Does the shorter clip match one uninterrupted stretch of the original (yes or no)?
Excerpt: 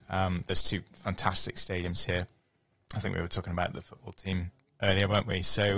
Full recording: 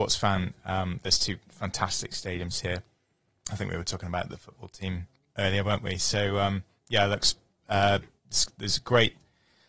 yes